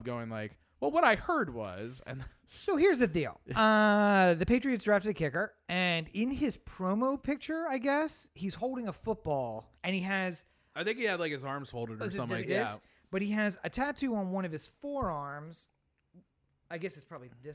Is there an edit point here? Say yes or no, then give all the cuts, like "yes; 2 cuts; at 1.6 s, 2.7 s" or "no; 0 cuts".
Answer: yes; 2 cuts; at 9.8 s, 12.4 s